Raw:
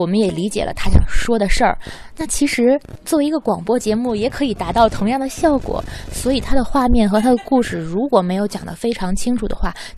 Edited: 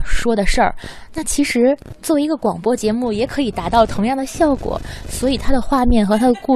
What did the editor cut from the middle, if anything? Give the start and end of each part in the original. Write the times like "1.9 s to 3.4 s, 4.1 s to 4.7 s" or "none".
none